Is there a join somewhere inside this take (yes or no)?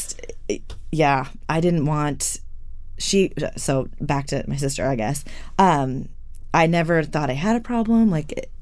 no